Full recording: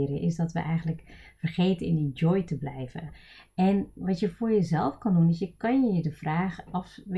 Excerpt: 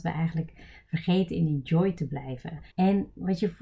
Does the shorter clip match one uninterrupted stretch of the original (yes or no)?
no